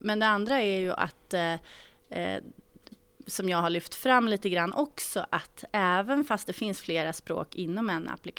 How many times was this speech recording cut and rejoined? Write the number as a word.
zero